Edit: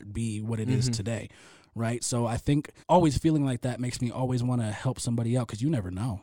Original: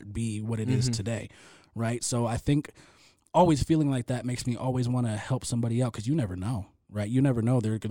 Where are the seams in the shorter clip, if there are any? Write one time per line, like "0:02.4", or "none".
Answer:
0:02.8